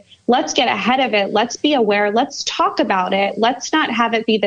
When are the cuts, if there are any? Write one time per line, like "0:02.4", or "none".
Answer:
none